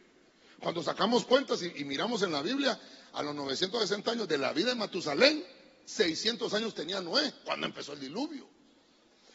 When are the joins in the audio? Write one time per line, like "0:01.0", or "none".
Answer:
none